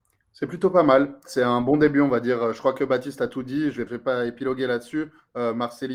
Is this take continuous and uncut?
no; 1 cut; at 3.9 s

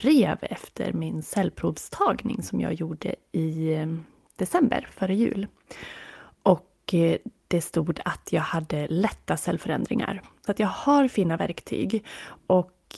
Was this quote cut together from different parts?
yes; 1 cut; at 10.5 s

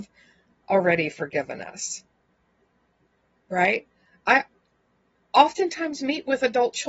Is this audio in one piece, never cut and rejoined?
yes; 0 cuts

